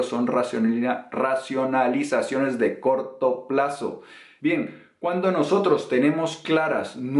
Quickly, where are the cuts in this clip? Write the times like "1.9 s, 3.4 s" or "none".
4.4 s